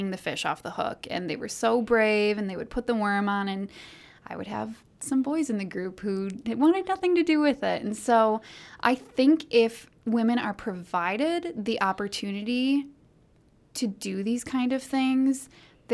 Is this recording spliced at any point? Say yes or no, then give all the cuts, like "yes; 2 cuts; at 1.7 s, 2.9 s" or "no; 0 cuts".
no; 0 cuts